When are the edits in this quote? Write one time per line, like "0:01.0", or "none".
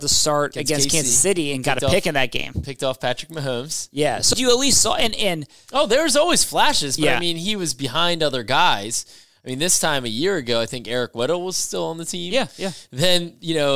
0:04.3